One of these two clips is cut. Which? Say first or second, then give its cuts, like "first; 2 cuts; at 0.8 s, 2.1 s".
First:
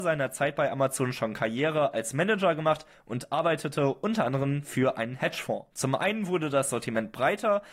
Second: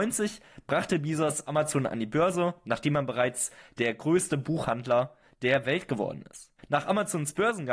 first; 1 cut; at 5.7 s